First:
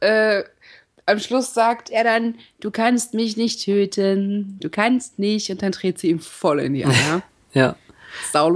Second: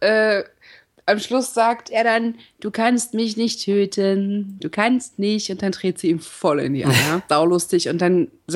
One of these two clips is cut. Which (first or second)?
second